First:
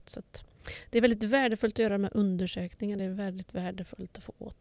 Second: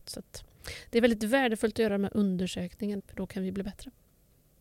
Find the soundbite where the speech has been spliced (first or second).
second